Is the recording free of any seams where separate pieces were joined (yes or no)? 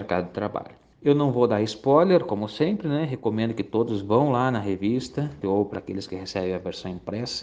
no